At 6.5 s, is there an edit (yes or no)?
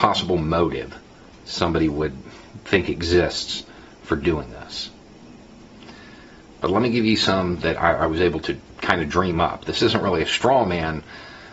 no